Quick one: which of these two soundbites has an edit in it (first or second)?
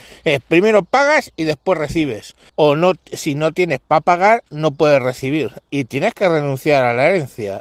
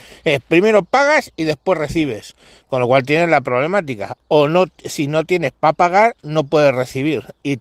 first